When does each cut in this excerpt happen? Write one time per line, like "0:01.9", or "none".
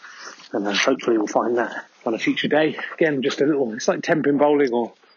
0:01.9